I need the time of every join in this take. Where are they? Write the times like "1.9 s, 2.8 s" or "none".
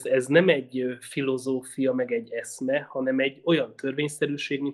none